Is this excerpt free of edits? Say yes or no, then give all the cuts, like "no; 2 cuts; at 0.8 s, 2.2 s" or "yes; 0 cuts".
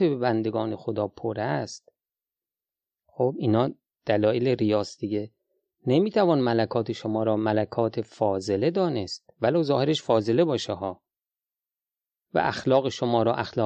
yes; 0 cuts